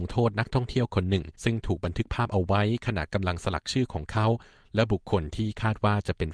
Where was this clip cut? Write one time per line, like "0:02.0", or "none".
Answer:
0:01.3

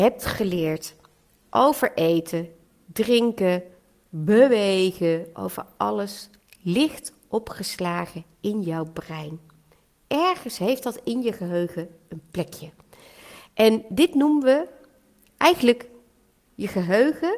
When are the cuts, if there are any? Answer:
none

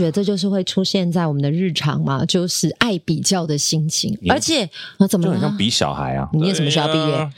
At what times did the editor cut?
0:06.3

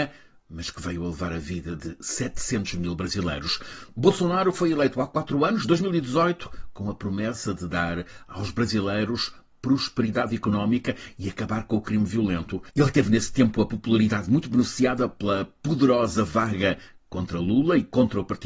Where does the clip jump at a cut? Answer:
none

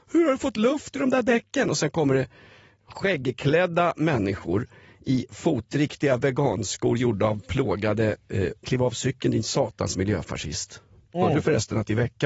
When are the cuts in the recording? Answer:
0:08.6

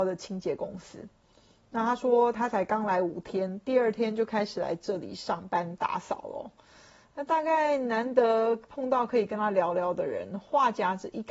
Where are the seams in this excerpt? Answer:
none

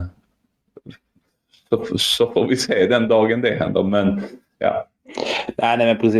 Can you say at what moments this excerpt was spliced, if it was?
none

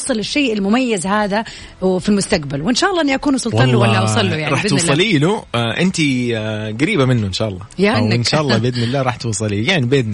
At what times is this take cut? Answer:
0:07.9

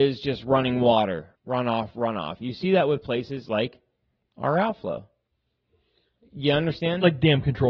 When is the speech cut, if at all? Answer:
0:01.4

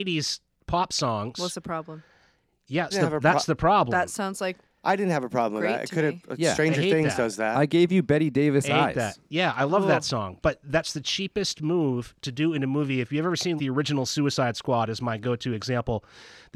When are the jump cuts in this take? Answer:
0:02.9
0:13.6

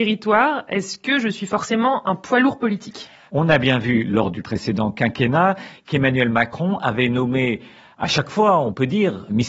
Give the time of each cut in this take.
none

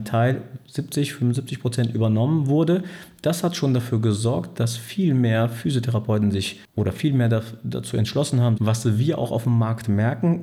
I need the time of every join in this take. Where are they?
0:08.6

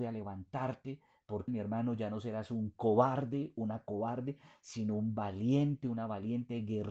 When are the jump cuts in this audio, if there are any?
0:01.5

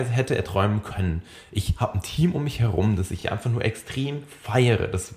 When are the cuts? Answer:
none

